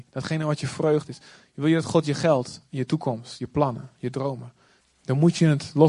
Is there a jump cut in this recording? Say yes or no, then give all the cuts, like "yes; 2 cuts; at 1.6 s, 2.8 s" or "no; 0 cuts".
yes; 1 cut; at 4.8 s